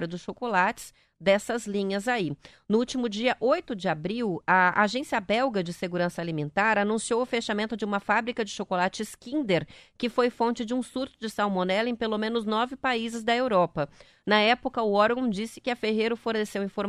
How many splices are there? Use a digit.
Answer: 0